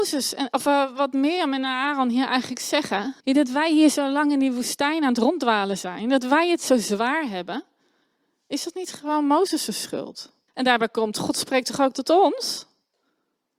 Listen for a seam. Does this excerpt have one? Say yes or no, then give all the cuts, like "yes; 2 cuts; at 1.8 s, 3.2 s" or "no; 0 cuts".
yes; 2 cuts; at 3.2 s, 10.5 s